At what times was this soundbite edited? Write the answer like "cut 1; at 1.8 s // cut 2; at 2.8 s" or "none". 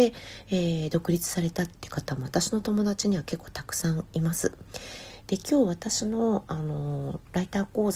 cut 1; at 5.2 s

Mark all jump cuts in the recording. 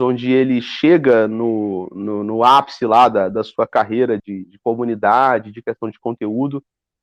cut 1; at 4.2 s

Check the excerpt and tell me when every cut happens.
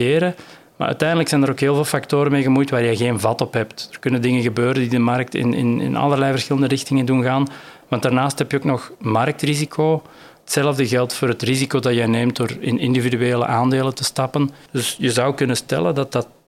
cut 1; at 7.8 s // cut 2; at 10.4 s // cut 3; at 14.7 s

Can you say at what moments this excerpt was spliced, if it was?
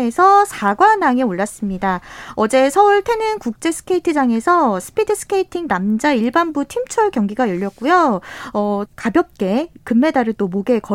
cut 1; at 8.9 s

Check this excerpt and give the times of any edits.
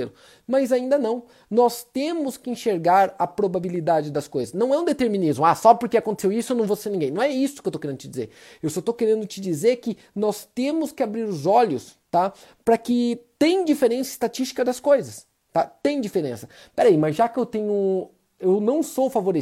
none

